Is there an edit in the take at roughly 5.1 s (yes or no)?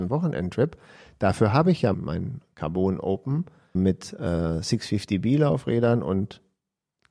no